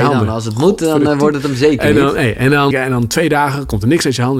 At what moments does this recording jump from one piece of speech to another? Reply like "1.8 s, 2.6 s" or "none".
2.7 s